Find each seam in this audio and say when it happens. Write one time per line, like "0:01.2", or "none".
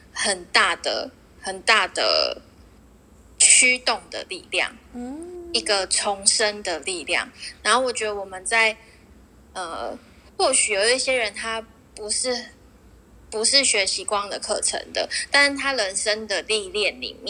none